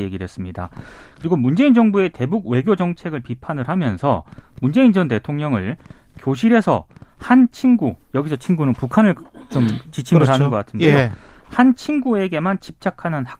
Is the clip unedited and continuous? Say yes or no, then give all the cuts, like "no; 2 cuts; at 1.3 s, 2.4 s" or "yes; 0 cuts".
yes; 0 cuts